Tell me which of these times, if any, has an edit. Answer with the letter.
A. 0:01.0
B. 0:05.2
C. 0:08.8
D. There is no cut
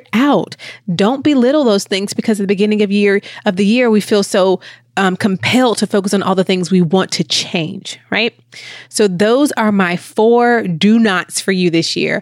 D